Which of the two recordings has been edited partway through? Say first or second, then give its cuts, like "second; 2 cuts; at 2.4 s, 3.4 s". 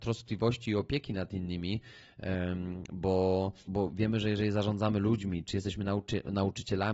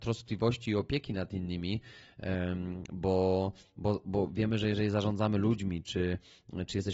first; 2 cuts; at 3.6 s, 5.5 s